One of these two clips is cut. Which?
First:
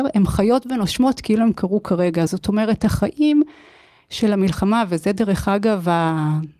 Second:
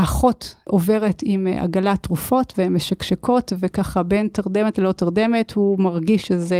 first; 1 cut; at 2.3 s

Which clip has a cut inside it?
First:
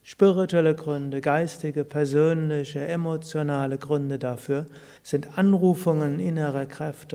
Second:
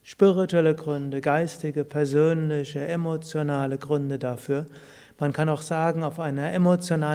first; 1 cut; at 5.0 s

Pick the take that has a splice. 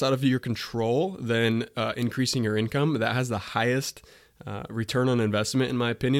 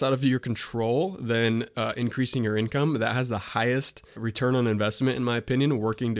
second; 1 cut; at 4.1 s

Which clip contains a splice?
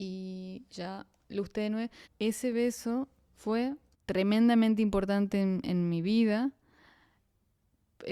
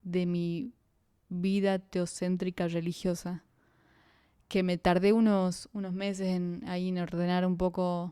first; 1 cut; at 2.0 s

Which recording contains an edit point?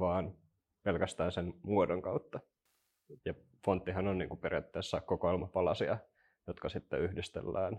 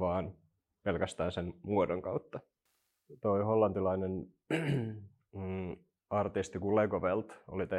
first; 1 cut; at 3.2 s

